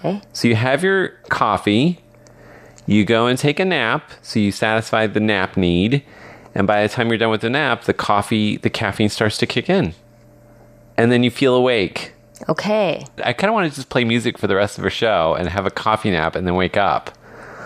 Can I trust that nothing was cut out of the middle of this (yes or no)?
no